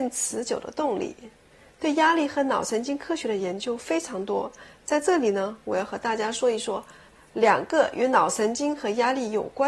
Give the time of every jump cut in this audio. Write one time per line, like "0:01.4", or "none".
none